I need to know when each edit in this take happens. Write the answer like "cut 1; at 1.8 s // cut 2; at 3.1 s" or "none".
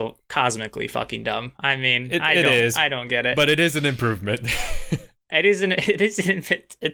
none